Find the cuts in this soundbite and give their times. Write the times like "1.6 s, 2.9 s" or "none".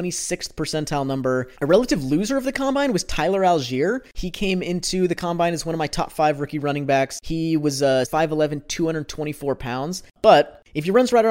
1.6 s, 8.0 s, 10.1 s